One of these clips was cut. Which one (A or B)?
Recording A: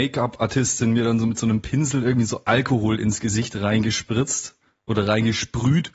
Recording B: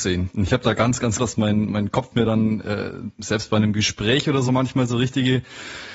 B